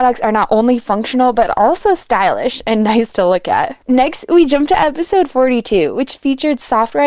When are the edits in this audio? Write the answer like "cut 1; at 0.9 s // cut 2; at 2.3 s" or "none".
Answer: none